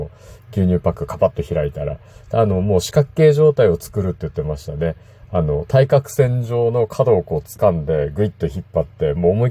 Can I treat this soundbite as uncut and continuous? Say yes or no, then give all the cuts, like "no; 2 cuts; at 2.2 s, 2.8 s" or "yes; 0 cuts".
yes; 0 cuts